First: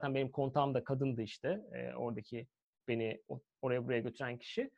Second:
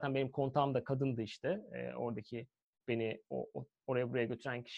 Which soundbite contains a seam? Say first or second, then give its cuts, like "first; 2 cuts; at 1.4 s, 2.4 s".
first; 1 cut; at 3.3 s